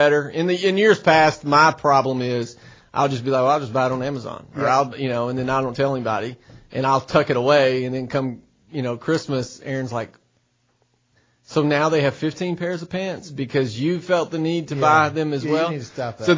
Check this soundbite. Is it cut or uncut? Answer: uncut